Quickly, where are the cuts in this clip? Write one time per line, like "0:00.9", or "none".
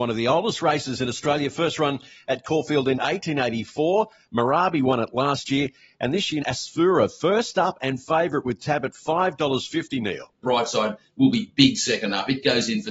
0:06.4
0:10.4